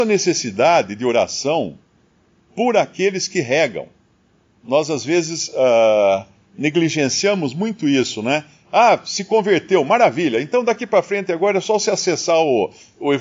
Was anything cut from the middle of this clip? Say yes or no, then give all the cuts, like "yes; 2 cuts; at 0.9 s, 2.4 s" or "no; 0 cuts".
no; 0 cuts